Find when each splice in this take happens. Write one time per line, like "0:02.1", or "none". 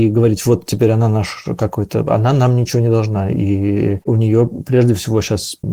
none